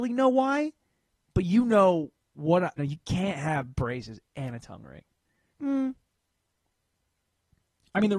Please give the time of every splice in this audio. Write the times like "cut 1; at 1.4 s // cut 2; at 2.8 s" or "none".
cut 1; at 2.8 s // cut 2; at 5.5 s